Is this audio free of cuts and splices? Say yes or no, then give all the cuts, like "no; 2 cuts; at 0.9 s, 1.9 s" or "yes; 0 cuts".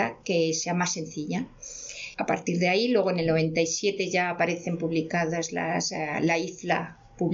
yes; 0 cuts